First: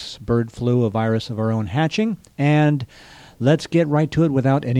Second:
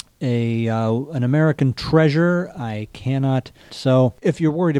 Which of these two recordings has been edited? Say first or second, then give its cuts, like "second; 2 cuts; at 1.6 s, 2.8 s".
second; 1 cut; at 3.7 s